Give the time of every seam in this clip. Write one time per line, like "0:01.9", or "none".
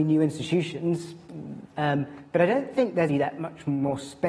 0:01.7
0:03.1

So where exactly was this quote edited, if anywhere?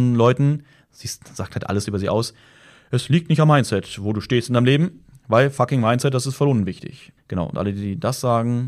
0:07.2

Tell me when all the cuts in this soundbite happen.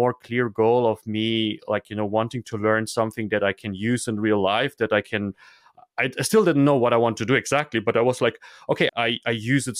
0:08.9

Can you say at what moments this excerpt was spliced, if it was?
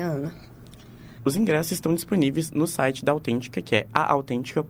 0:01.2

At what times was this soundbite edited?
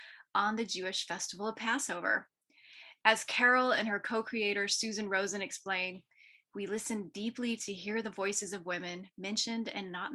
none

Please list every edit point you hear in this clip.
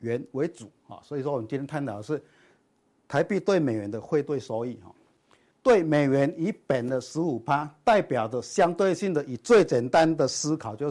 0:05.5

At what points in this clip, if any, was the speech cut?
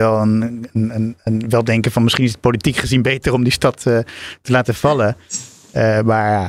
none

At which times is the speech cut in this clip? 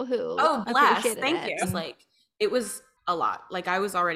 0:01.6

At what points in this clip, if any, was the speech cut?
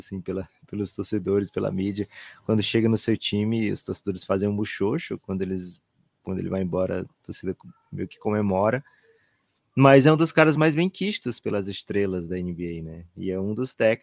none

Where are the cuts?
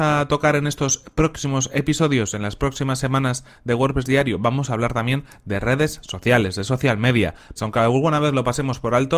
0:07.6

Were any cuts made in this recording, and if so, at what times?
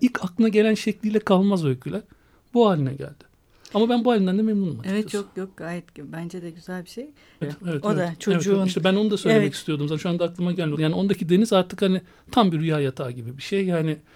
0:07.4
0:10.8

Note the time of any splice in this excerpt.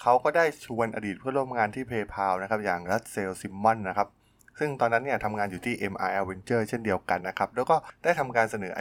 0:07.2

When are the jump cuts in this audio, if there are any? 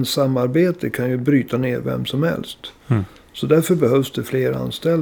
none

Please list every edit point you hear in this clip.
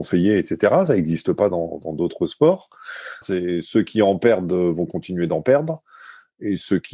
0:03.2

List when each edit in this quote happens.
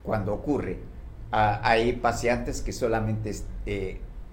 none

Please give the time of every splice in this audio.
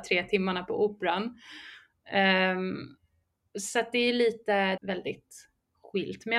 0:04.8

